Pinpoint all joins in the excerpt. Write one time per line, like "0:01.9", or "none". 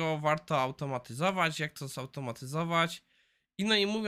none